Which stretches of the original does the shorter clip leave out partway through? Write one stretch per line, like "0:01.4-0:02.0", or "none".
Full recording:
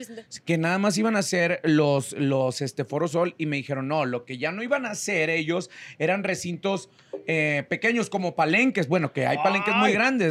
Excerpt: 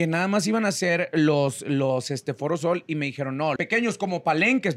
0:04.1-0:07.7